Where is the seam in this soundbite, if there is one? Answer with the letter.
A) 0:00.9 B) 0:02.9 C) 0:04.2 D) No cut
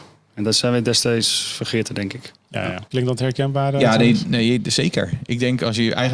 B